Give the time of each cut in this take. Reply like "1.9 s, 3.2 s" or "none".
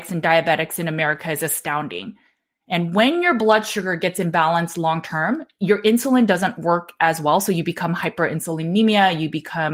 none